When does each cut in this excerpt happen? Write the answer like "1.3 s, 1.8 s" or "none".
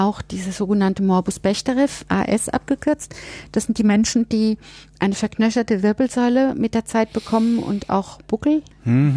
2.1 s